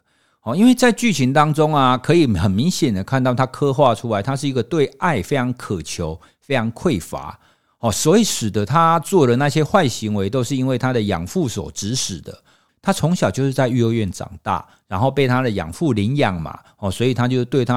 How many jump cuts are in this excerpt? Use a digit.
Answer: 1